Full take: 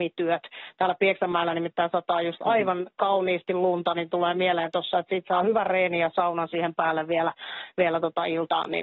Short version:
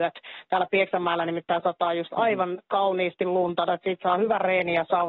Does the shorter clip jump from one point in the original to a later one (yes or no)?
yes